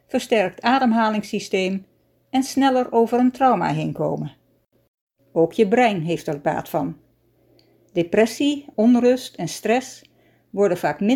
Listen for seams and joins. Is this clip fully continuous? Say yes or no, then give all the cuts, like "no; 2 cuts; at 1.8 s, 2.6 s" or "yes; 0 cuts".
no; 2 cuts; at 5.2 s, 8.7 s